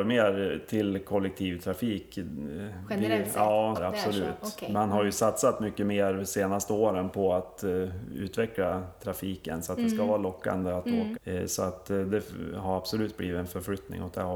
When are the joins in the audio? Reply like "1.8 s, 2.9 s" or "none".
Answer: 3.7 s, 11.1 s